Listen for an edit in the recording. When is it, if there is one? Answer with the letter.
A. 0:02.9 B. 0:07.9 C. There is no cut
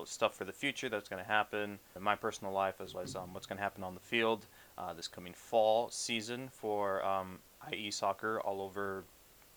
A